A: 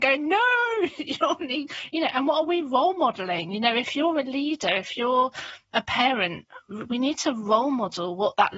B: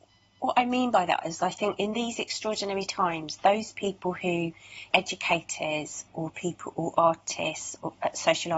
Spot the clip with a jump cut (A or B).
B